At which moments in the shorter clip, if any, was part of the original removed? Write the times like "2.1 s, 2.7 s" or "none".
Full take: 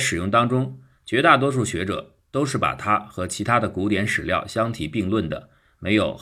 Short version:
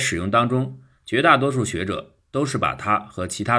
none